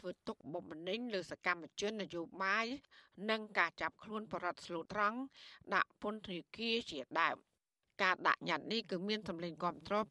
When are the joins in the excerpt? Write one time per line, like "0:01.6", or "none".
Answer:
0:04.9